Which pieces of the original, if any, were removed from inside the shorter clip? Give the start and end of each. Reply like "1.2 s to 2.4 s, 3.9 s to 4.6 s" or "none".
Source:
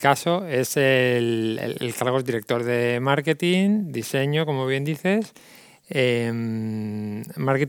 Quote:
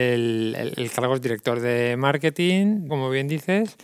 3.9 s to 4.5 s